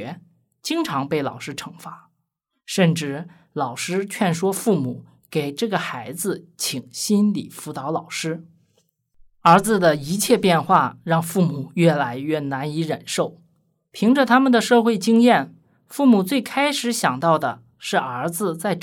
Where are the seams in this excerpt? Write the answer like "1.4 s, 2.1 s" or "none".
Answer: none